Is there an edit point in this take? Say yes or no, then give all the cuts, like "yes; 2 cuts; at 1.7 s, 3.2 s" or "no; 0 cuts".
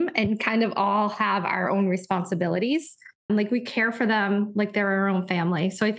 yes; 1 cut; at 3.3 s